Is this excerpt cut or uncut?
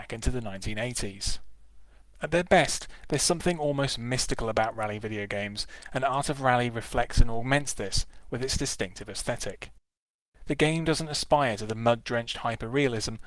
cut